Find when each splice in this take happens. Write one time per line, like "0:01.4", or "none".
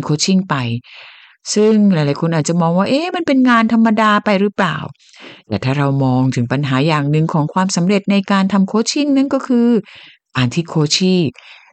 none